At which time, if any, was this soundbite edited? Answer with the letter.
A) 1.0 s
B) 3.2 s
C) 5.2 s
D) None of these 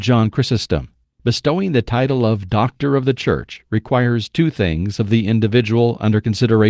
A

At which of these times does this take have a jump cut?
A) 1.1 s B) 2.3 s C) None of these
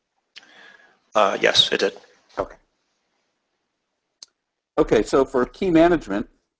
B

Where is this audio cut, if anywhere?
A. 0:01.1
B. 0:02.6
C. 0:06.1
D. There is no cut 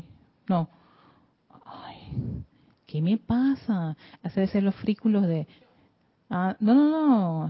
D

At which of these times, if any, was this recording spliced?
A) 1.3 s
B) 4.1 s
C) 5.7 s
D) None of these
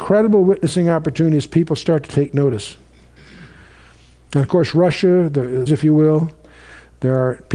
C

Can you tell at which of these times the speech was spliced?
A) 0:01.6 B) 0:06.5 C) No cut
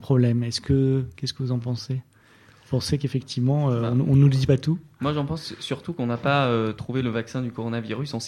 C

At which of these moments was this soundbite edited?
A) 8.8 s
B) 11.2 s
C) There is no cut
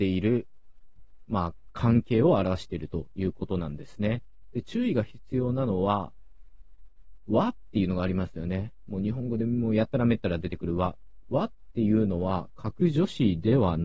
B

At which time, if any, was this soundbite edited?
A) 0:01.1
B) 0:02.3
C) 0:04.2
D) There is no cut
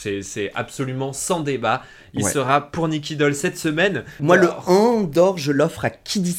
C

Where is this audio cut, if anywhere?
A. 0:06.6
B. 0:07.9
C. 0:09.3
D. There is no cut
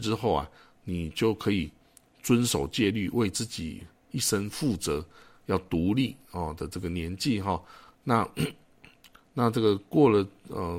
D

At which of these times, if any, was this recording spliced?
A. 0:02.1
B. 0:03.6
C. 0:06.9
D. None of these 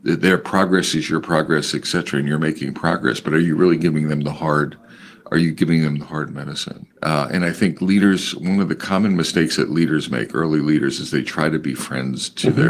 C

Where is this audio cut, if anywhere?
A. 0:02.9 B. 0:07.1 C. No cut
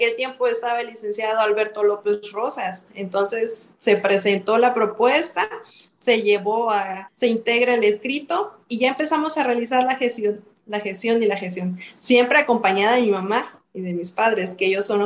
B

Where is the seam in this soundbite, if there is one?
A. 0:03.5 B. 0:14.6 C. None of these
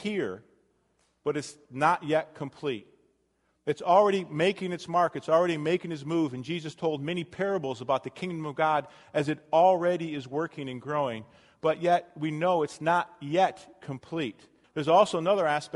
B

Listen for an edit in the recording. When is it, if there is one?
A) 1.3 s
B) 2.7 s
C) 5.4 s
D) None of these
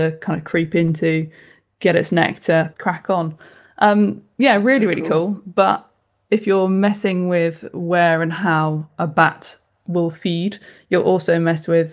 B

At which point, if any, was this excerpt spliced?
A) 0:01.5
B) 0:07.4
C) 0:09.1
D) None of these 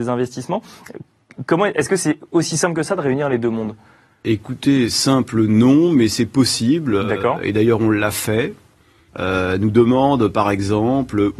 C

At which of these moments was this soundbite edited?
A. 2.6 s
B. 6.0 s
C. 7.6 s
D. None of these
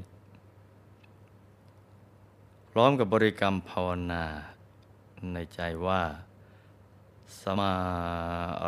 C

